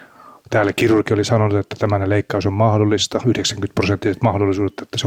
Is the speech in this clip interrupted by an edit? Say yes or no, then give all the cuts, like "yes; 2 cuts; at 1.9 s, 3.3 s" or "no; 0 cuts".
yes; 1 cut; at 3.2 s